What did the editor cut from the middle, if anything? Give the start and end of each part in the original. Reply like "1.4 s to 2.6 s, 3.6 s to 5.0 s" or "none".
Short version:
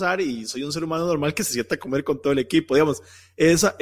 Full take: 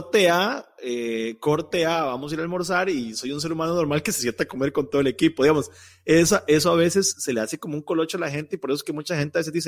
none